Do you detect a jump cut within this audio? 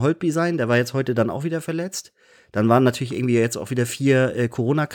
no; 0 cuts

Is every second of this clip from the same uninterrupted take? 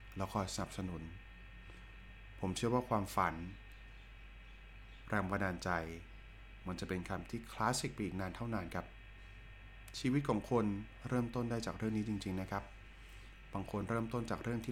yes; 0 cuts

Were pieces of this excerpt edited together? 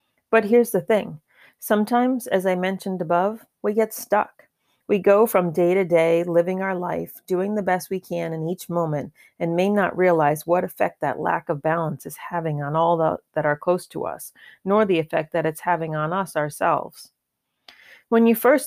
yes; 1 cut; at 4.8 s

